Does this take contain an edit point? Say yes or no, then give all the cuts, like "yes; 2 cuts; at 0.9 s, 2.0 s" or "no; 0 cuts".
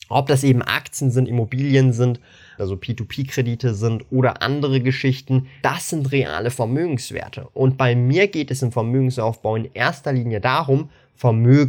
yes; 2 cuts; at 2.6 s, 5.6 s